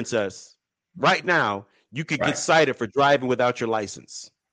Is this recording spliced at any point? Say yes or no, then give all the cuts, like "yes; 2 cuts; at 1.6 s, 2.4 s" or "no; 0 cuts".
no; 0 cuts